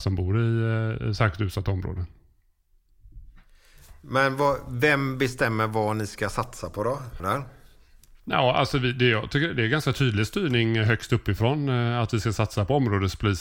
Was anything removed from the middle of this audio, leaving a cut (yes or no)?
yes